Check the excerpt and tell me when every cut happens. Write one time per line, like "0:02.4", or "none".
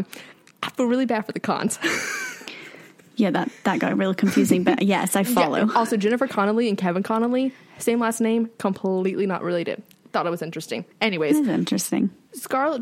0:10.9